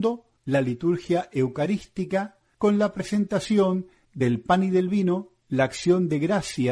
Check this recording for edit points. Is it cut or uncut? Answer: uncut